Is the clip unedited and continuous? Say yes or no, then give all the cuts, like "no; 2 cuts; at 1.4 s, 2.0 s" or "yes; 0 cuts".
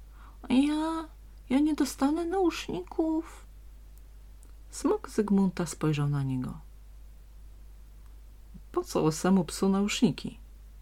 yes; 0 cuts